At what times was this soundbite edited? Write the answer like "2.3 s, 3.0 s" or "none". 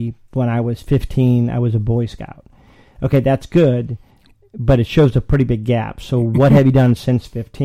none